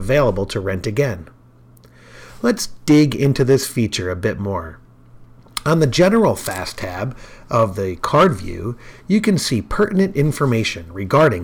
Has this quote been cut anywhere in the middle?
no; 0 cuts

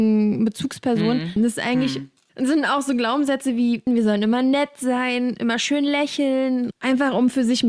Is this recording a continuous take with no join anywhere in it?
no; 3 cuts; at 1.4 s, 3.9 s, 6.7 s

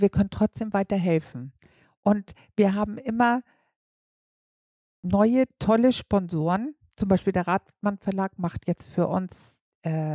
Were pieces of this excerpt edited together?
no; 0 cuts

